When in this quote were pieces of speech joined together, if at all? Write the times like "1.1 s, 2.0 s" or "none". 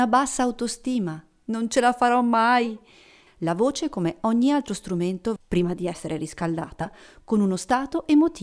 3.3 s, 5.4 s

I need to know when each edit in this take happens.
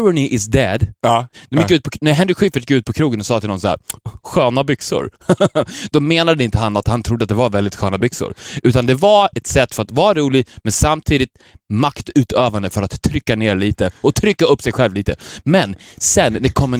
1.3 s

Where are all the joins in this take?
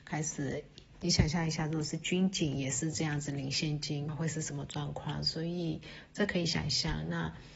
0.9 s, 4.1 s

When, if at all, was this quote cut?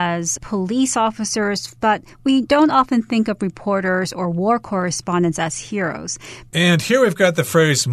1.8 s, 6.5 s

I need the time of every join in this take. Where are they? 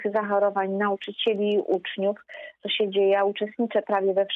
2.6 s

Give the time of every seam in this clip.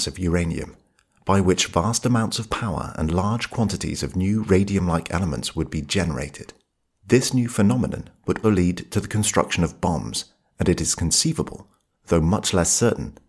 8.4 s

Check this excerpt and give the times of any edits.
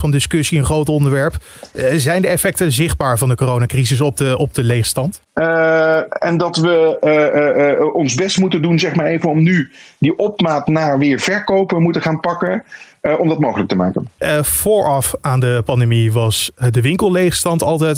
5.3 s

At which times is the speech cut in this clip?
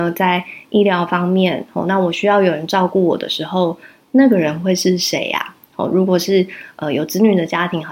none

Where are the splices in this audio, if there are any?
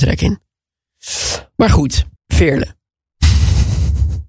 2.2 s

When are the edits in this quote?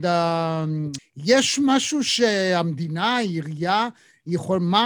1.0 s

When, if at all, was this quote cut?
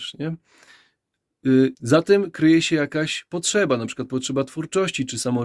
1.7 s

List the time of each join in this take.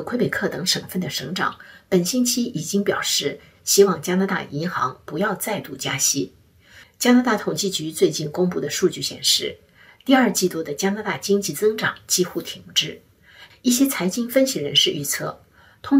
6.8 s, 13.5 s

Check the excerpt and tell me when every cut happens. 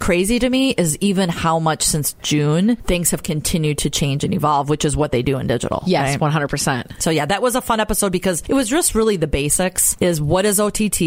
none

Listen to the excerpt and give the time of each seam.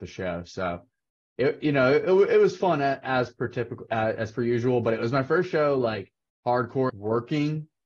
6.9 s

